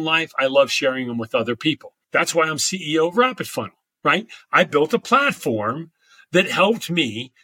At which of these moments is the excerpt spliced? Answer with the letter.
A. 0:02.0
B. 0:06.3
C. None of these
A